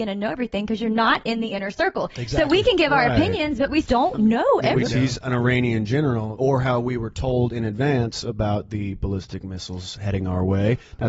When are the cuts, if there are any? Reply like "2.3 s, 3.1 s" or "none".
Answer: 3.8 s, 4.8 s, 6.4 s